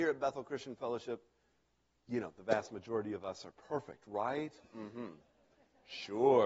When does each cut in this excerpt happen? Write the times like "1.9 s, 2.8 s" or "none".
none